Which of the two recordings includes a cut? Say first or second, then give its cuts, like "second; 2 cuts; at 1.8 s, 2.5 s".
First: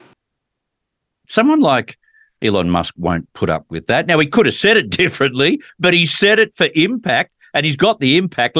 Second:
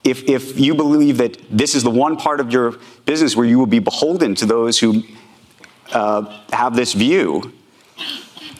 first; 1 cut; at 1.2 s